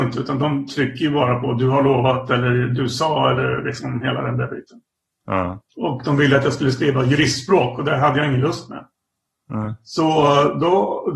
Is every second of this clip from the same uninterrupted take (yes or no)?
no